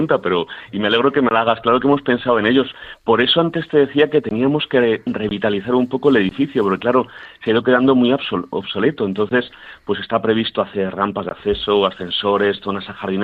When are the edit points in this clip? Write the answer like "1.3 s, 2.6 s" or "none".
none

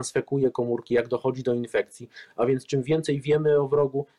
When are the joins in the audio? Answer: none

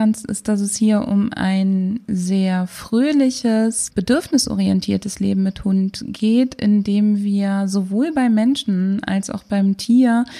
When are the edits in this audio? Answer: 3.9 s

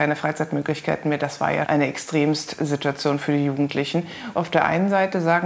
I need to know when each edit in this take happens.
1.6 s, 4.3 s

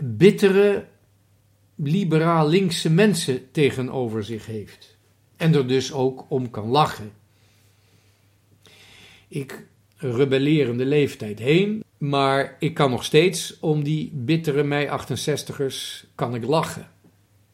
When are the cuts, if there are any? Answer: 9.8 s, 11.8 s

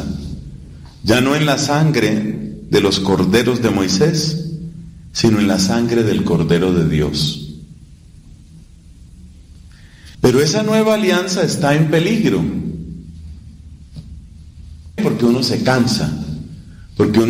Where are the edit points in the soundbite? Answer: 10.1 s, 15.0 s

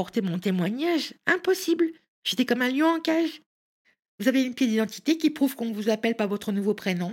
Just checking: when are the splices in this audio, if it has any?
none

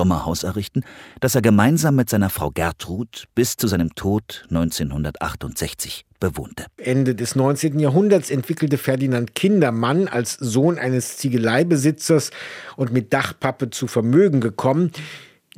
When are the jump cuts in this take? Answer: 6.8 s

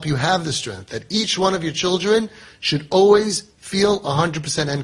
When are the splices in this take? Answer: none

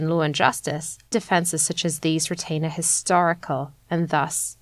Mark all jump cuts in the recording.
1.1 s

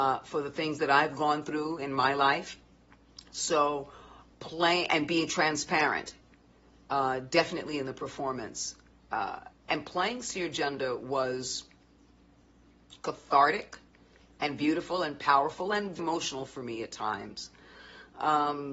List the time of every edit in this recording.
4.3 s, 16.0 s

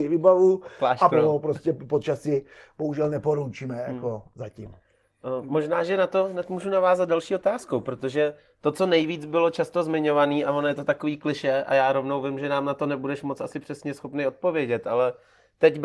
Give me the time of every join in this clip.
1.1 s

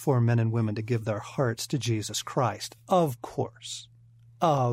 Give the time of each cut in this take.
none

